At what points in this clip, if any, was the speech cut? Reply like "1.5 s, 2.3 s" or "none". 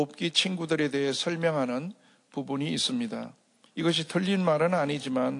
3.7 s